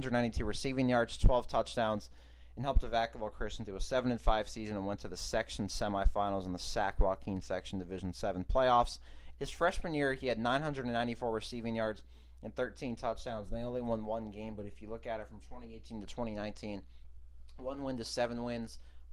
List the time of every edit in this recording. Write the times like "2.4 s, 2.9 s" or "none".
9.3 s